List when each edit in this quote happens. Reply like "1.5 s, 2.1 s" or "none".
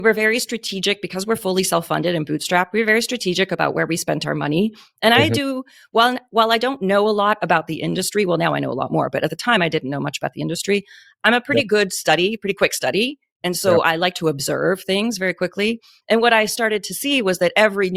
none

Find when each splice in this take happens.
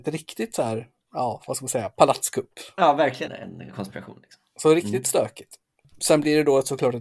3.3 s

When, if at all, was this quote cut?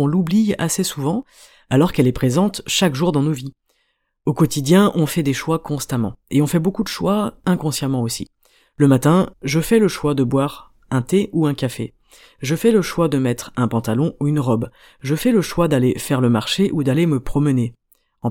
9.3 s

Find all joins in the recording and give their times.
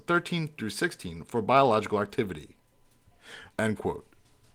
3.5 s

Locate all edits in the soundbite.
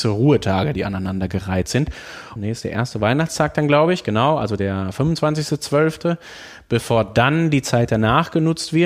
2.4 s

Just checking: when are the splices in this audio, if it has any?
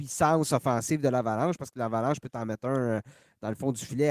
none

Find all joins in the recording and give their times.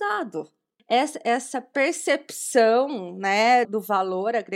3.6 s

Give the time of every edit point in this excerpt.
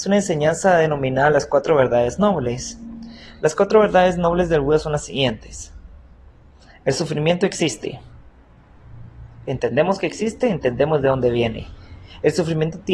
9.4 s

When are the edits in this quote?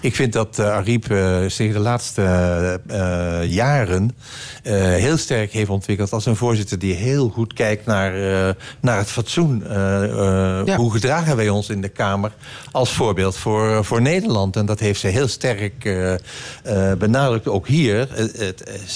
none

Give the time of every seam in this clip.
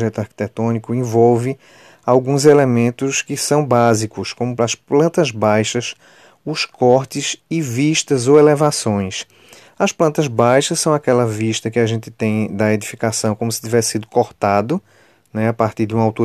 4.6 s, 9.6 s

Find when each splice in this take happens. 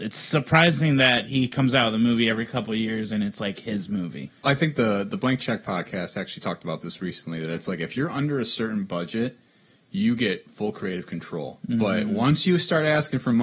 4.3 s

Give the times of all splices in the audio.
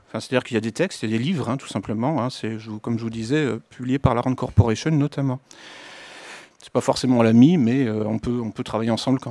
6.5 s

